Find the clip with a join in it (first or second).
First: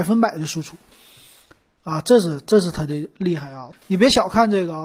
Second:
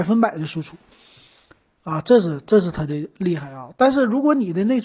first